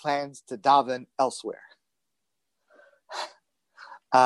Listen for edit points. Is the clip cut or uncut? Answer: uncut